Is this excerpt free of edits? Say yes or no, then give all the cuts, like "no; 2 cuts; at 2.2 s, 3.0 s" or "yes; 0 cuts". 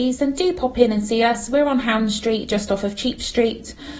yes; 0 cuts